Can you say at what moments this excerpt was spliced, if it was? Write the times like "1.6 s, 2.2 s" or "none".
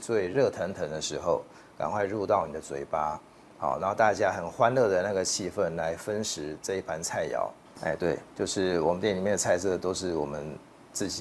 7.8 s